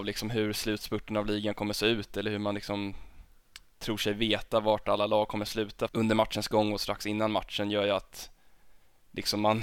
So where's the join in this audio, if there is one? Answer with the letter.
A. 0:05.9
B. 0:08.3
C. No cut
A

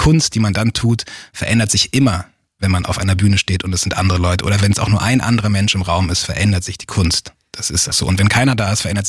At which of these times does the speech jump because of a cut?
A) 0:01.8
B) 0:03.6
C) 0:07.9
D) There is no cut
C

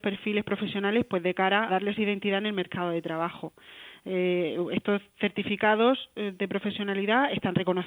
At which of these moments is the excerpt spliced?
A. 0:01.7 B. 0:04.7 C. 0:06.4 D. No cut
A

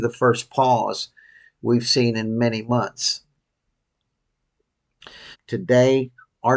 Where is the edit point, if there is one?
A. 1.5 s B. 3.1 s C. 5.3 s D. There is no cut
C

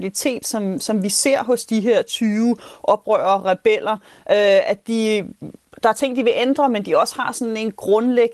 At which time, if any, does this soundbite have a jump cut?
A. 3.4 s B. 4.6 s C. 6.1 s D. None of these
D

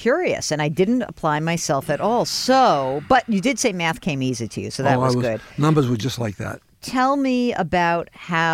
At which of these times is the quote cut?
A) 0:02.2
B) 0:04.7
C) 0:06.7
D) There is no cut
D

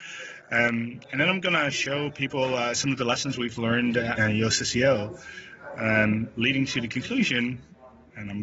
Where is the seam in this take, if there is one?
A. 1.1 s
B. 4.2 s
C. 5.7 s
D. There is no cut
B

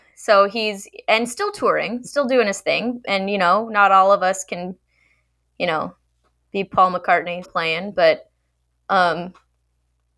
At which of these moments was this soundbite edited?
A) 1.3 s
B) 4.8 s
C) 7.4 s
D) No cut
C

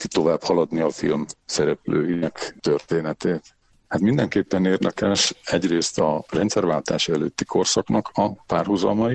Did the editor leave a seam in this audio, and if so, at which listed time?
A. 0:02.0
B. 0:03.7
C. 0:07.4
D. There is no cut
B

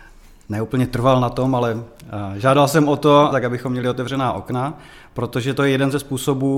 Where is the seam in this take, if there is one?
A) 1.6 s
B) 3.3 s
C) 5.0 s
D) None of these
B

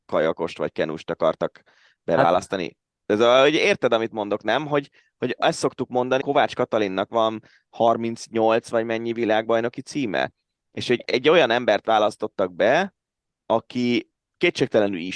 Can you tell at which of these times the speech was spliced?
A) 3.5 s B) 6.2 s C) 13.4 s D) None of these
B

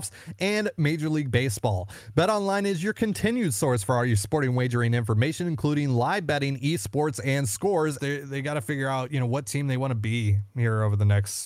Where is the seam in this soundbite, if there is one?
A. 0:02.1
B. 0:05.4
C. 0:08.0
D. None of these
C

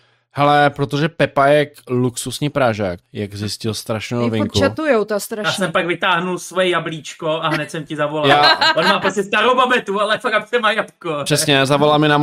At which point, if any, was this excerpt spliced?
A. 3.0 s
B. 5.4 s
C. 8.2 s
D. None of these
A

